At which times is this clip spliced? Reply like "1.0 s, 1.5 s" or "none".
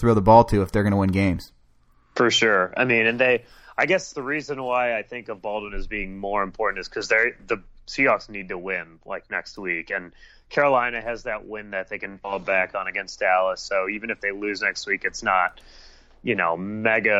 none